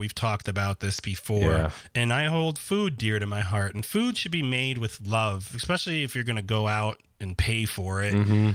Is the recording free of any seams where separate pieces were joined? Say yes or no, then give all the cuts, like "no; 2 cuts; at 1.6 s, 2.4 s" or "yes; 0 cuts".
yes; 0 cuts